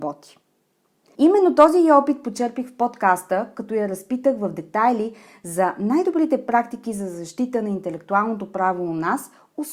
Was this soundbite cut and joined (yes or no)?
yes